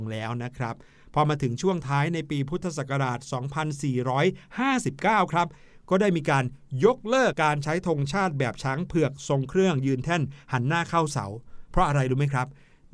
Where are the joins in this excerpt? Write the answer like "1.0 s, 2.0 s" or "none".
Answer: 7.3 s